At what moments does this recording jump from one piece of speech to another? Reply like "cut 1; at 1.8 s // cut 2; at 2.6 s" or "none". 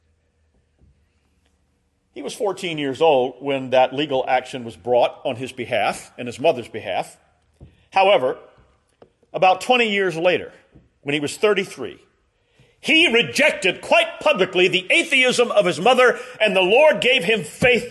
none